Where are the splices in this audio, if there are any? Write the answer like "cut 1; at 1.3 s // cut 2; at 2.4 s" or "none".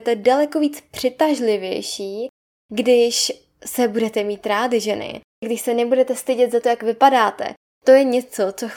none